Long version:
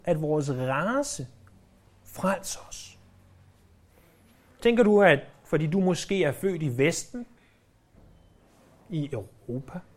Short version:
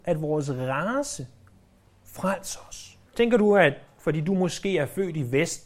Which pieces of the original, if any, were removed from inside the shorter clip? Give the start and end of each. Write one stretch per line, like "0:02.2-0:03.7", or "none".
0:03.1-0:04.5